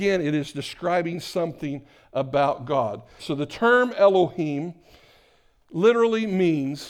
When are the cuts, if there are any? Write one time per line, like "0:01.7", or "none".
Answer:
0:03.2

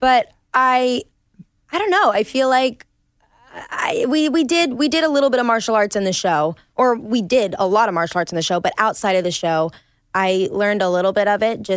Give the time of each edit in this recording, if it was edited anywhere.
none

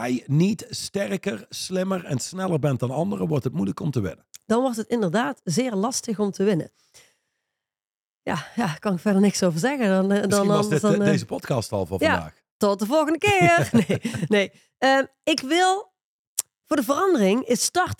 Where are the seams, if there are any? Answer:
none

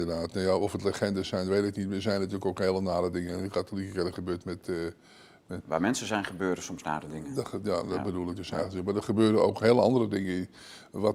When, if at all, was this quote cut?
0:05.6

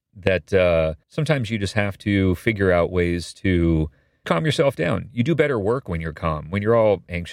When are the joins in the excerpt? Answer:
0:01.0
0:04.2

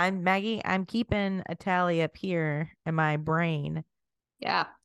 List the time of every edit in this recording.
none

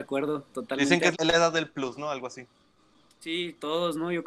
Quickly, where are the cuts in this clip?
0:01.1

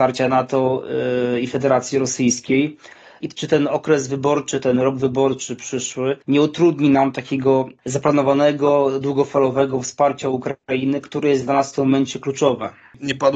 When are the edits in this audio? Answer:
0:03.2
0:06.2

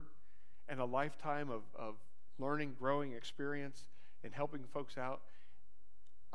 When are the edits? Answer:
none

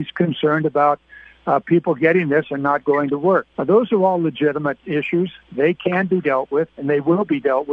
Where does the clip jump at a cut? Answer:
0:03.5

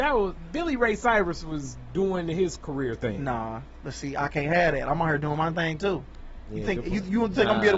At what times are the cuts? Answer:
none

